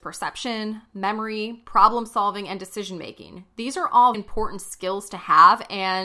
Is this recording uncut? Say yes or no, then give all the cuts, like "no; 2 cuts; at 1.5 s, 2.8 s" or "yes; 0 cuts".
no; 1 cut; at 4.1 s